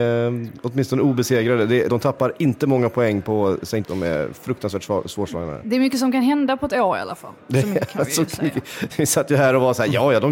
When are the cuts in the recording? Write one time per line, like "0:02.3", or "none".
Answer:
0:01.9
0:03.8